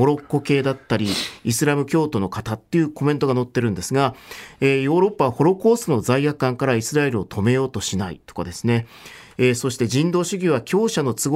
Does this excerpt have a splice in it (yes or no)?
no